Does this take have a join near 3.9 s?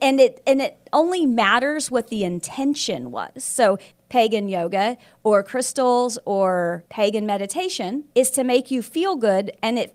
yes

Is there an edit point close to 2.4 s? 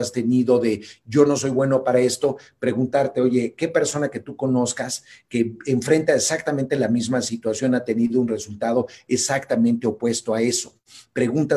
no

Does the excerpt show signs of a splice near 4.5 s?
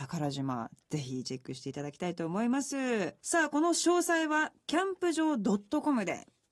no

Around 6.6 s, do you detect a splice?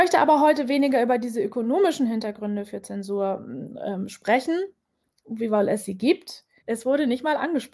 yes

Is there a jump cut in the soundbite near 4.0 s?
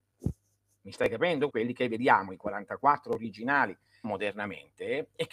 yes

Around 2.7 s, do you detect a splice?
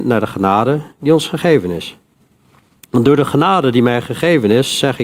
yes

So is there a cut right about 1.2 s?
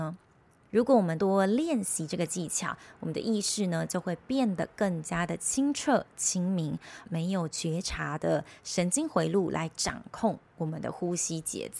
yes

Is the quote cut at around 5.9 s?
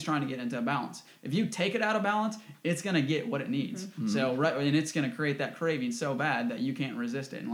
no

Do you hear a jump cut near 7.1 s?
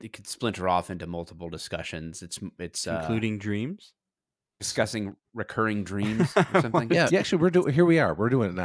yes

